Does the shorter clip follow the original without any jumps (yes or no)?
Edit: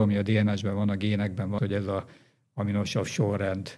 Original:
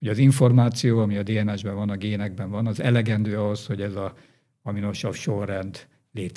no